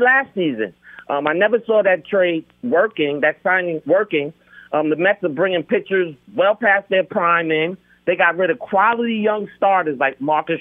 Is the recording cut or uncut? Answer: uncut